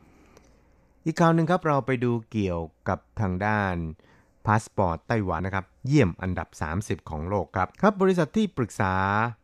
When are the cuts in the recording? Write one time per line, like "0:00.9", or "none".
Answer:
0:05.4
0:07.7